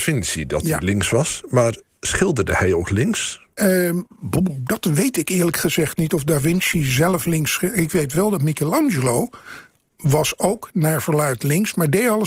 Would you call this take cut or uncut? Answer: uncut